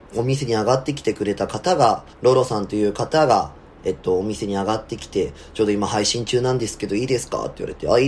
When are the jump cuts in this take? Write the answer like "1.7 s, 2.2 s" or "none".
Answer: 2.1 s